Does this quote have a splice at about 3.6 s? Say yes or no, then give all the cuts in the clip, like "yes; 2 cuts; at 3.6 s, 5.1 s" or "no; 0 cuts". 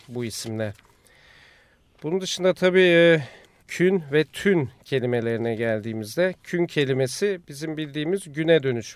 yes; 1 cut; at 3.6 s